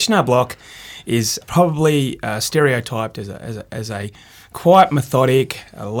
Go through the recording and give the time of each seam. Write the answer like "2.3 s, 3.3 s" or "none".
1.4 s